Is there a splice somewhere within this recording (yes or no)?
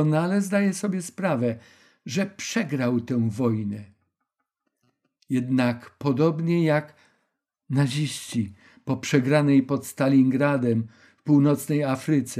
no